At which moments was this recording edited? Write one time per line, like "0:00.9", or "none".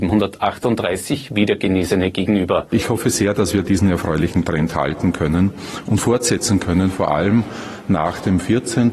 none